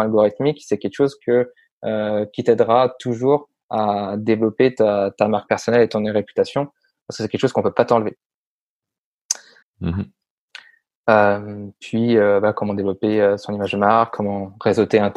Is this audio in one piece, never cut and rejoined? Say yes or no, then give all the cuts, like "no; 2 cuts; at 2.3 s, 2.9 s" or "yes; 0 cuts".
no; 1 cut; at 9.6 s